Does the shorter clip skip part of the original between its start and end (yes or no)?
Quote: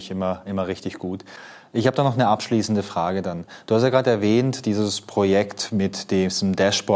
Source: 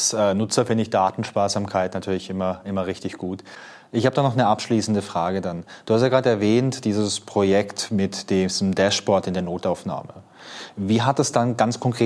no